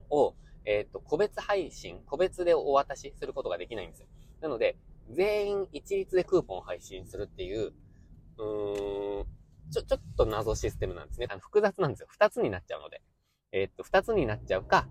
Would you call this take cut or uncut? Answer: cut